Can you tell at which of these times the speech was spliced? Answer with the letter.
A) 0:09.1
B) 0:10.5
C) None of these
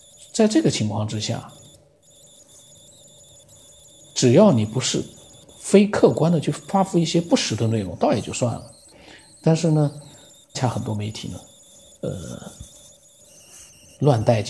B